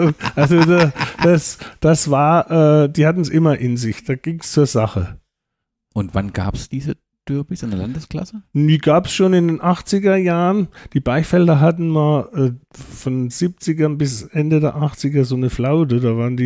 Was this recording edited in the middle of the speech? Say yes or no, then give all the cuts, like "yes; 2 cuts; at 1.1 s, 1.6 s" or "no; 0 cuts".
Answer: no; 0 cuts